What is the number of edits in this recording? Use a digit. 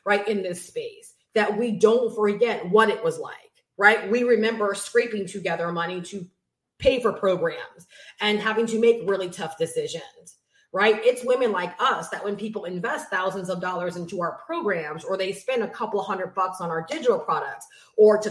0